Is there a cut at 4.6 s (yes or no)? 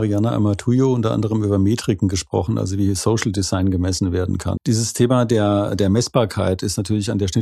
yes